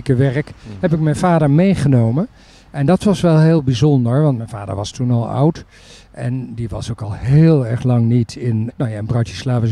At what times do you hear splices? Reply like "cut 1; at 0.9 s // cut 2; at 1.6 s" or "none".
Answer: cut 1; at 8.7 s